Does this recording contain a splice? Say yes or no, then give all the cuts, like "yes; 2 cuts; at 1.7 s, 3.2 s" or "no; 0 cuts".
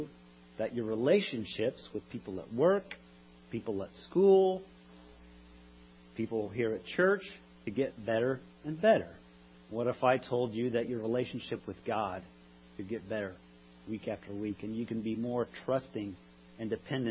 yes; 1 cut; at 9.5 s